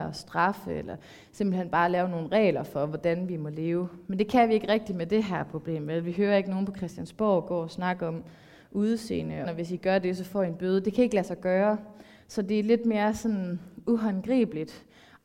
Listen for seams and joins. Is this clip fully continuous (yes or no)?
no